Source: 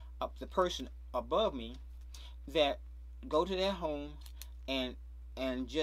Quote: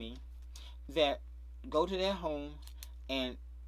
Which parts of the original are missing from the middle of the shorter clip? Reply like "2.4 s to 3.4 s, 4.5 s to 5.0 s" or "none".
none